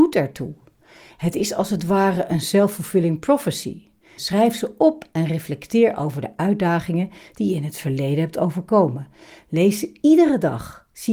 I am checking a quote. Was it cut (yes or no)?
yes